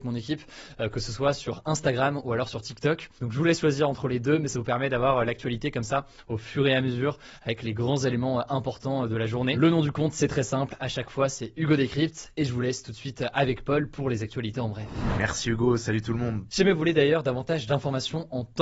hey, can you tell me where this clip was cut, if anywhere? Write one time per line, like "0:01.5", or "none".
0:03.2
0:16.5